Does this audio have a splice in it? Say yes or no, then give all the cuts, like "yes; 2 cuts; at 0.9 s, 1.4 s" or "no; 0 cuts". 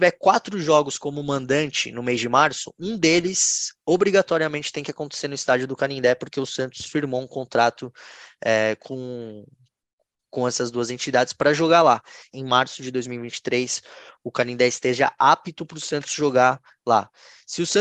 yes; 1 cut; at 12.3 s